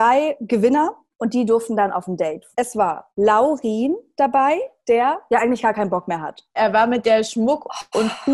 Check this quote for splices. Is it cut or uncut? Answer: uncut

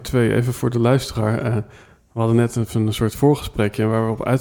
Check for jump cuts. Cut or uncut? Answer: uncut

